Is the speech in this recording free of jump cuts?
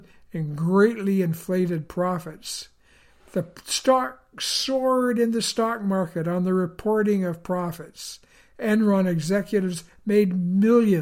yes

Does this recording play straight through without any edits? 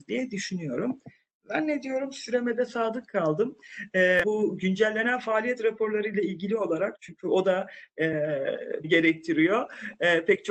no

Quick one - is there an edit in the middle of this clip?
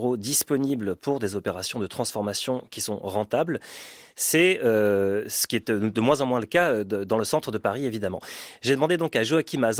no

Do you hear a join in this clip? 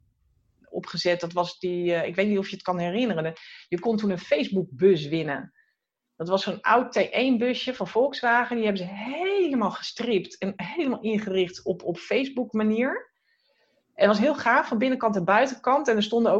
no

